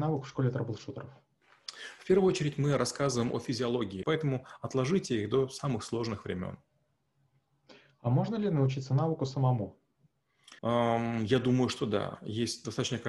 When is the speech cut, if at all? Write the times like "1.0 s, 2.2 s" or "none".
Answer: 4.0 s, 10.6 s